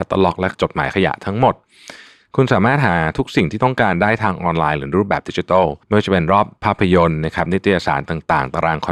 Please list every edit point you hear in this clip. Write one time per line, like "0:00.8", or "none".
0:05.8